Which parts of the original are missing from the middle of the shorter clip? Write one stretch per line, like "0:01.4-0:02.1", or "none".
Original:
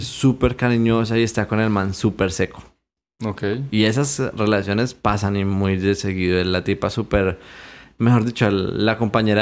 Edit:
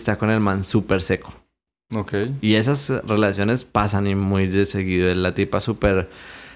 none